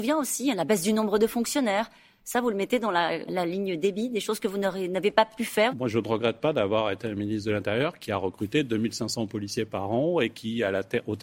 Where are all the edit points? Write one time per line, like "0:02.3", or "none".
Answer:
0:03.3
0:05.7